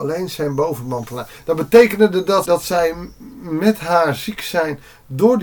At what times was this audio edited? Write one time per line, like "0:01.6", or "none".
0:02.4